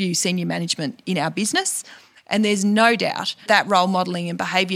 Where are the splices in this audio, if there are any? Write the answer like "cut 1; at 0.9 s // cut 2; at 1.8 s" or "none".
cut 1; at 3.5 s